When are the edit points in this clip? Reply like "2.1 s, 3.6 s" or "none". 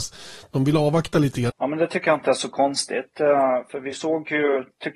1.5 s